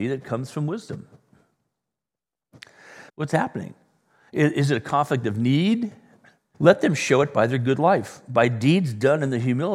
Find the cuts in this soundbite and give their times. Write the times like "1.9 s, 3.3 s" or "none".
3.1 s, 6.5 s